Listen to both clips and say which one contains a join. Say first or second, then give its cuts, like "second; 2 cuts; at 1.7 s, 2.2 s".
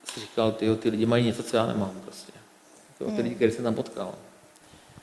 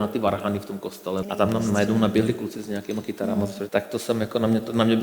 second; 2 cuts; at 1.2 s, 3.7 s